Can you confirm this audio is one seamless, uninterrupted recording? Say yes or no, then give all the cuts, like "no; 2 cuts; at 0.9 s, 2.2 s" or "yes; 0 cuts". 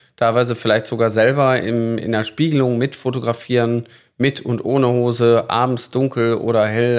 yes; 0 cuts